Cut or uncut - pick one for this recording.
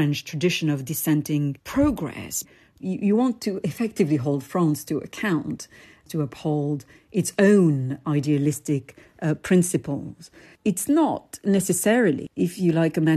uncut